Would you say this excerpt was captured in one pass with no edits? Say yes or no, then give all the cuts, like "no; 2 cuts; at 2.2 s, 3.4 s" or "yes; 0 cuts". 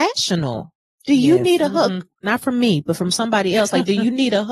yes; 0 cuts